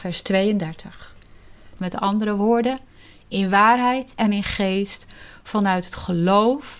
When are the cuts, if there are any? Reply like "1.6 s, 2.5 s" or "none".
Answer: 1.8 s

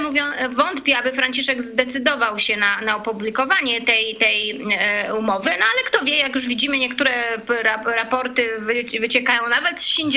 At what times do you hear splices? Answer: none

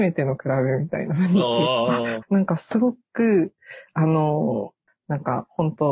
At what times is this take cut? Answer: 2.2 s, 4.9 s

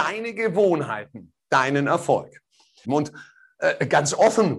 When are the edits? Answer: 2.8 s

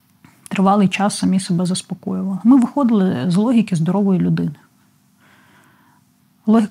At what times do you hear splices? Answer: none

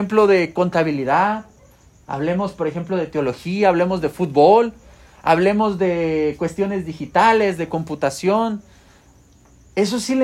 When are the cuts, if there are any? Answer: none

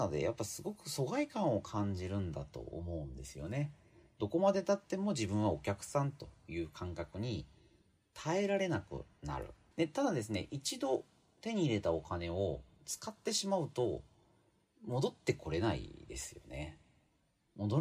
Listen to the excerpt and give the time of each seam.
9.7 s

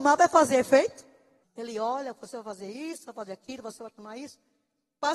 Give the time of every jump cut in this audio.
1.4 s

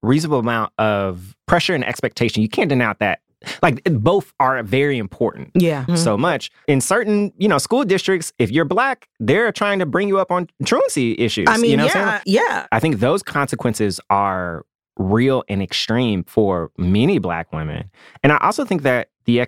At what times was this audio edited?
5.9 s, 12.2 s

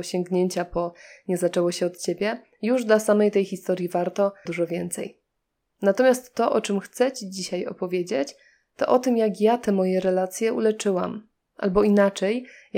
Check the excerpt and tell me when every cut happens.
4.5 s

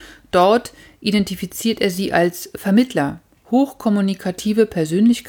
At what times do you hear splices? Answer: none

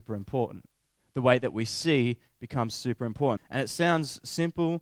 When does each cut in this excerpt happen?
3.4 s

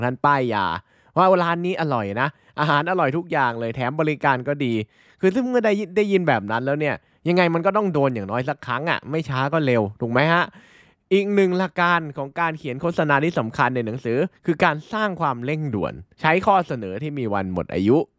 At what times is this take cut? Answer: 11.7 s, 16.1 s

